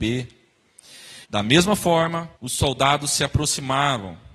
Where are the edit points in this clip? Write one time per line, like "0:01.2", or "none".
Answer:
0:01.2
0:02.3